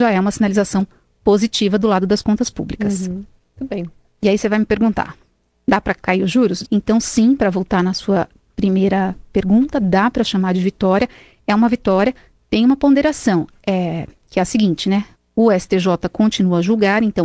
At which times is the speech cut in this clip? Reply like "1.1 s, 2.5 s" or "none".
5.5 s, 6.6 s, 15.1 s